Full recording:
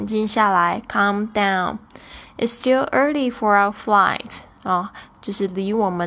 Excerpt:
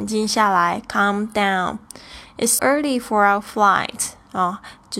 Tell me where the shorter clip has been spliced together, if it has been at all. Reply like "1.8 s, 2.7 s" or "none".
2.6 s